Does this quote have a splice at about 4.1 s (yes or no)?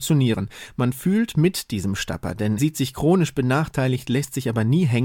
no